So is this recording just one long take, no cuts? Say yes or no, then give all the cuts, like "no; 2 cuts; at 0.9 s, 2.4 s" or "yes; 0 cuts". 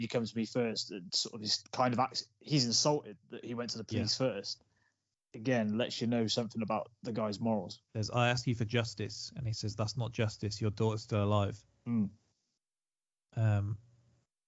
no; 1 cut; at 7.8 s